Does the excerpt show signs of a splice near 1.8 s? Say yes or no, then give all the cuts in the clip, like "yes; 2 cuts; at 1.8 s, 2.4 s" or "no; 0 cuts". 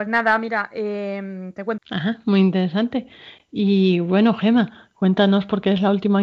yes; 1 cut; at 1.8 s